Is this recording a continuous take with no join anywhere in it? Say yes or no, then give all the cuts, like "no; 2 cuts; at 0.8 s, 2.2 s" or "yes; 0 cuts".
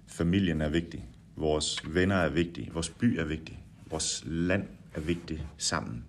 no; 1 cut; at 2.7 s